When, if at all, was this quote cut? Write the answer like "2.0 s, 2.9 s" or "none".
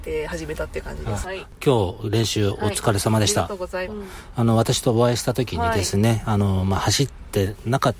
1.2 s, 3.9 s